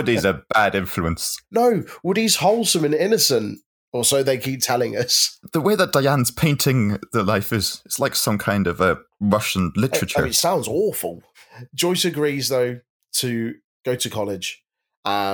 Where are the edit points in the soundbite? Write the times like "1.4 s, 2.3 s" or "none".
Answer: none